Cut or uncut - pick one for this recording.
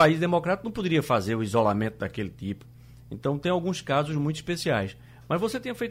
uncut